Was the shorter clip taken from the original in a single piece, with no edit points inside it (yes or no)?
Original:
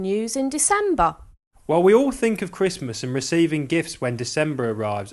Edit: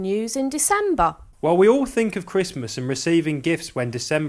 no